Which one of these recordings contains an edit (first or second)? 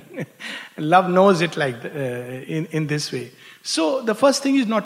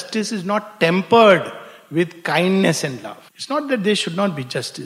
second